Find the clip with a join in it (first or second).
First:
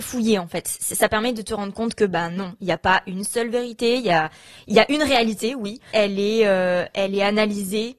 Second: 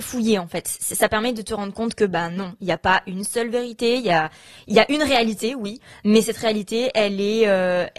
first